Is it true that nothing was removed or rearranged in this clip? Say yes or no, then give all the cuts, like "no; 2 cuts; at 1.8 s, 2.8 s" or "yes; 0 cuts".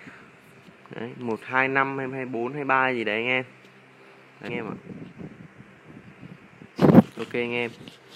no; 1 cut; at 4.5 s